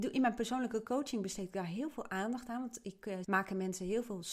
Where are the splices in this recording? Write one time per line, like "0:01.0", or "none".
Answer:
0:03.2